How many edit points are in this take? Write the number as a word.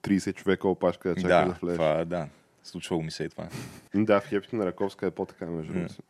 one